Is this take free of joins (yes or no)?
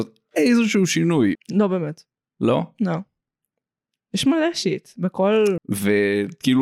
no